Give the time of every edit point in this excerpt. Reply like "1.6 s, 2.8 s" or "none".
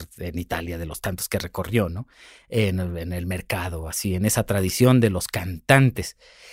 none